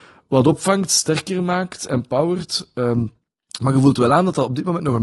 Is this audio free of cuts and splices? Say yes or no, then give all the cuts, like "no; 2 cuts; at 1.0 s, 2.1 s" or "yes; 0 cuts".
yes; 0 cuts